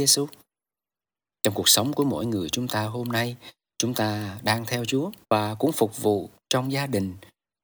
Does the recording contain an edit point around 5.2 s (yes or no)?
yes